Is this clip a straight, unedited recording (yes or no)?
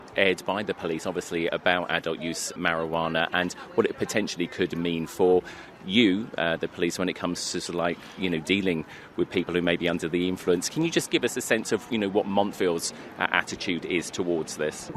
yes